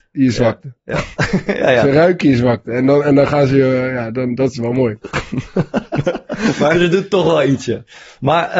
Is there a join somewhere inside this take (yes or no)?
yes